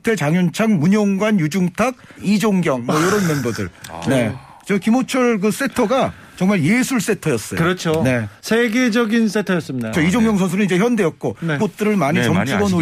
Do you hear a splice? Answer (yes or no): yes